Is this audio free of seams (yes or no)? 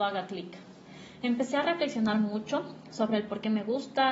yes